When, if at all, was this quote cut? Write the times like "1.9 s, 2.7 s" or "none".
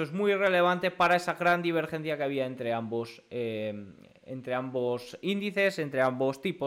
none